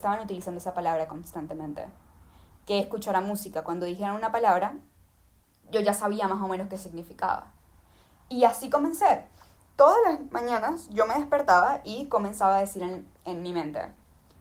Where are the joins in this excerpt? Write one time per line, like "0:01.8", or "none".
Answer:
none